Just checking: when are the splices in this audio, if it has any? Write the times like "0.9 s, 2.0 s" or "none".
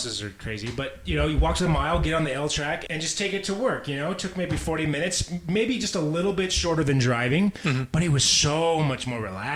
2.9 s